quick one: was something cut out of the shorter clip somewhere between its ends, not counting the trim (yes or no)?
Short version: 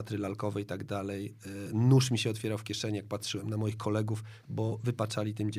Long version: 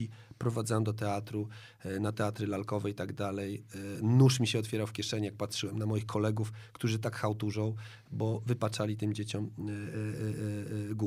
yes